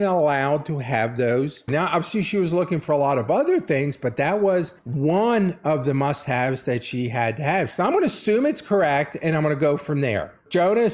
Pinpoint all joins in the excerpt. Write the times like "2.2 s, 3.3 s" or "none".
1.7 s, 7.7 s